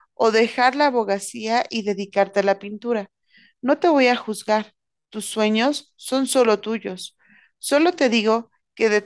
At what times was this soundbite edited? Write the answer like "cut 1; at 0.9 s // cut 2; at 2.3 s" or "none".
none